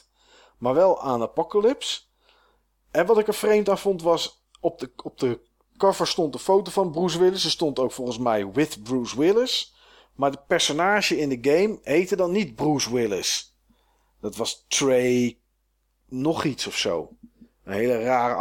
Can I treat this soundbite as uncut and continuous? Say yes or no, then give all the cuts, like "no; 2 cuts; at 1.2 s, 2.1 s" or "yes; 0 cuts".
yes; 0 cuts